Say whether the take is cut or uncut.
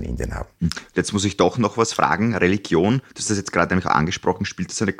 uncut